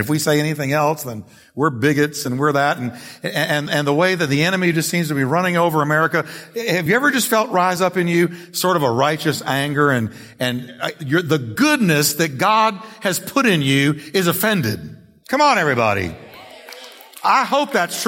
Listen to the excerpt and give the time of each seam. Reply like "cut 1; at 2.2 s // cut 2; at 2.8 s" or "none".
cut 1; at 2.2 s